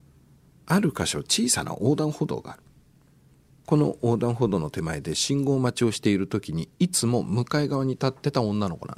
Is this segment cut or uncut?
uncut